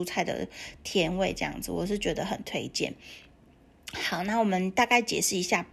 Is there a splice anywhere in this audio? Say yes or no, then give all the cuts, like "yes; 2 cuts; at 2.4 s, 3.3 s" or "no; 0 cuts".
no; 0 cuts